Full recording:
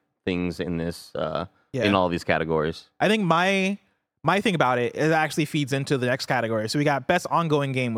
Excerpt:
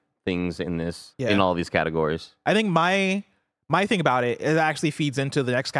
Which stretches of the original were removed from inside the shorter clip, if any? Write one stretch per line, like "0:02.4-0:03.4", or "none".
0:01.1-0:01.7